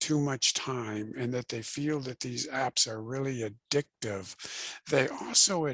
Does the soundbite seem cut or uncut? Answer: uncut